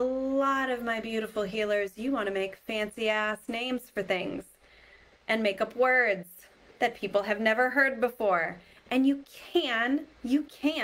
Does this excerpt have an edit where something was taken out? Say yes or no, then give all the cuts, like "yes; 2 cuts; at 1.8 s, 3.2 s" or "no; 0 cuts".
no; 0 cuts